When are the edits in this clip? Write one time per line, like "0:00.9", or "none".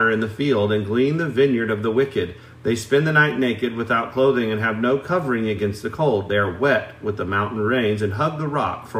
none